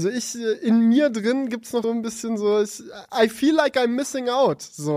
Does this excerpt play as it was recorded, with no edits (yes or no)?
no